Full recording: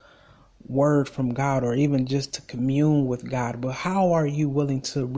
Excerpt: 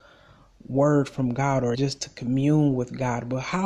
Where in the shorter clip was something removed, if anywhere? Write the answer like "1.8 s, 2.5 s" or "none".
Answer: 1.7 s